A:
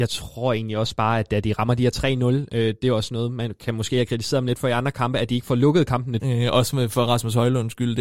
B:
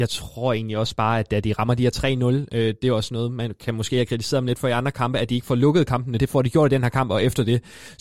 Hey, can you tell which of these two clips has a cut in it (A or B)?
A